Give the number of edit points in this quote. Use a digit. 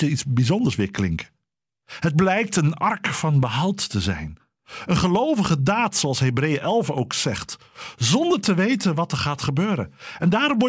0